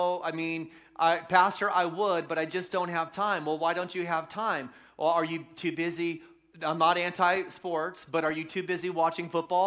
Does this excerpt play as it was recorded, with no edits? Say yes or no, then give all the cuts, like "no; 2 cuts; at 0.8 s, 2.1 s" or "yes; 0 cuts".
yes; 0 cuts